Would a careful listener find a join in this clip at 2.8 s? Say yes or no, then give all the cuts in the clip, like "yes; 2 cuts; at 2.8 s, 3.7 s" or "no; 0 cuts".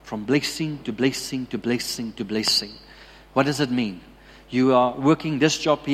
no; 0 cuts